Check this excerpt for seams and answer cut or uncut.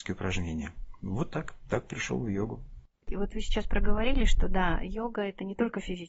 uncut